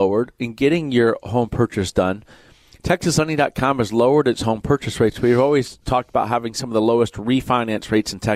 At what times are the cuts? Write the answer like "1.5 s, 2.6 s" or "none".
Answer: none